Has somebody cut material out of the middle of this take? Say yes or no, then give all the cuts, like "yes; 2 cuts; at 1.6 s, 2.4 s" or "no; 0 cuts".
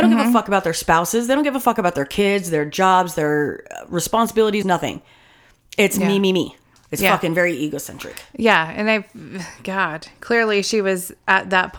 yes; 1 cut; at 4.6 s